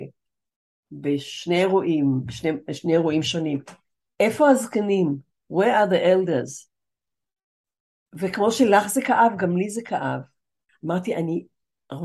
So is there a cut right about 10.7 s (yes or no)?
yes